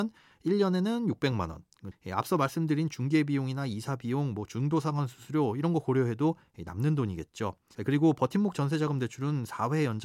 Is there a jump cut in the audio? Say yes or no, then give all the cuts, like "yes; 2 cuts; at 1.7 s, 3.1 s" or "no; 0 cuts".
yes; 2 cuts; at 1.9 s, 7.7 s